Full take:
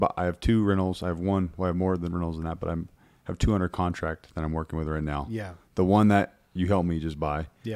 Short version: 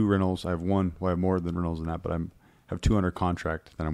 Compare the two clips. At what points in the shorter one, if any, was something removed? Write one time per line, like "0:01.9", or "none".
none